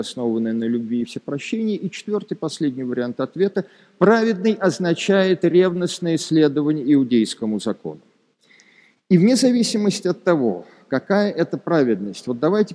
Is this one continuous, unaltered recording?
yes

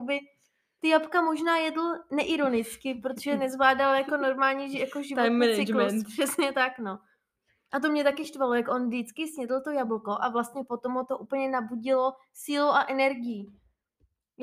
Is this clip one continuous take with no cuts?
yes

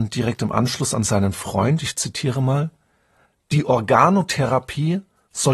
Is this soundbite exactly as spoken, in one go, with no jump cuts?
yes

